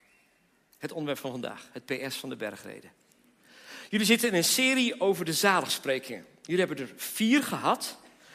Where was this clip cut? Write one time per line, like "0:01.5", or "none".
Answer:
none